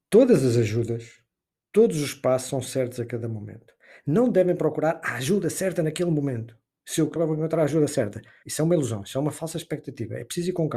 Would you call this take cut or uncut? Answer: cut